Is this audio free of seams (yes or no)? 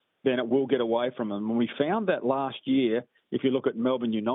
yes